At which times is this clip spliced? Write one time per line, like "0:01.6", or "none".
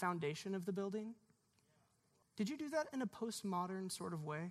0:02.2